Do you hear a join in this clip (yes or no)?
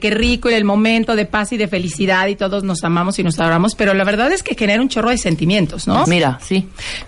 yes